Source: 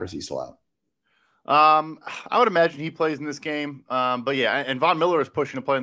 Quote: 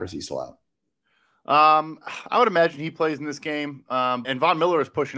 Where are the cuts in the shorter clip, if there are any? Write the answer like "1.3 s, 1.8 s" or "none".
4.2 s